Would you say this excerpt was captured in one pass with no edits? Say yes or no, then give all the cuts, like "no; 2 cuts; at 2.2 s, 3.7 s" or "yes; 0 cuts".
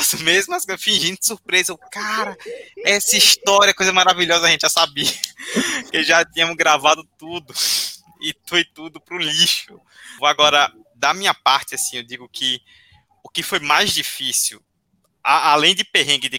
no; 1 cut; at 10.2 s